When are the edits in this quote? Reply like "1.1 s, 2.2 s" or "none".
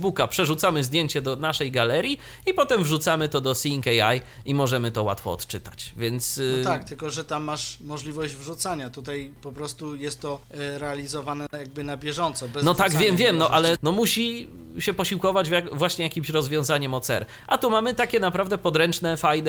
10.4 s, 13.8 s